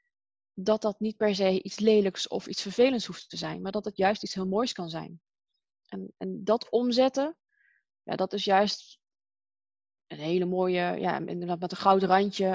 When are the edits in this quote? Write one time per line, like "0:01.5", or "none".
none